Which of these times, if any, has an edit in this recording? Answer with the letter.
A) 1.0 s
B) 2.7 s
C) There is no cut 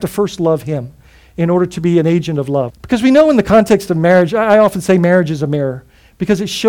B